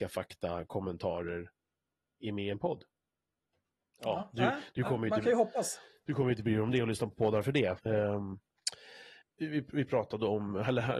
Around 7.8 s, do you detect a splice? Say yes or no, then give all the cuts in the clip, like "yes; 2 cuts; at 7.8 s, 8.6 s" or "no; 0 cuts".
yes; 2 cuts; at 7.8 s, 9.2 s